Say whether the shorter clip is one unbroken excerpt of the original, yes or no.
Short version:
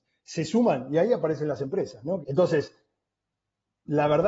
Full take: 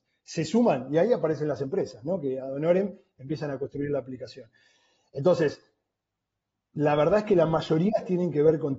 no